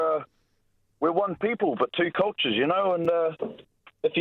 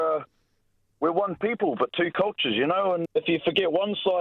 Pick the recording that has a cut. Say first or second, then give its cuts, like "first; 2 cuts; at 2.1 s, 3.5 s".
second; 1 cut; at 3.0 s